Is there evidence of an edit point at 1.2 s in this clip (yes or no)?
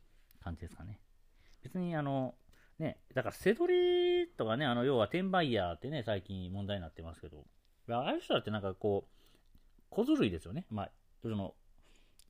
no